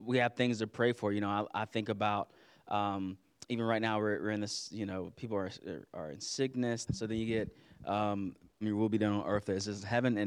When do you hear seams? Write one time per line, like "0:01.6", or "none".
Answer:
0:06.9
0:08.6